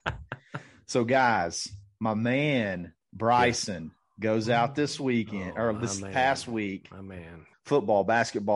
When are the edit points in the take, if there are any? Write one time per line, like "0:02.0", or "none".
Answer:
0:07.5